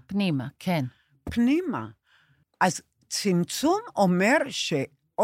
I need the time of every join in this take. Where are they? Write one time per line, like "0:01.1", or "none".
0:02.4